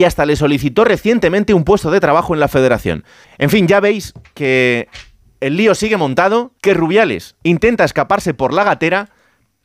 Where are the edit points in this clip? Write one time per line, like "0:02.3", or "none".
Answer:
0:03.2
0:06.6